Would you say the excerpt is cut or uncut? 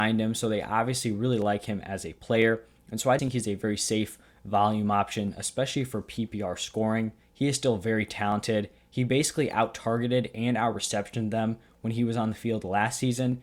cut